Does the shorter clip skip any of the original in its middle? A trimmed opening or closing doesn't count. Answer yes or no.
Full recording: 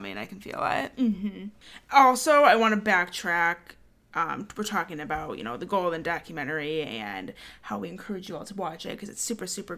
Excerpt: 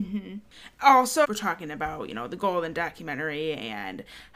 yes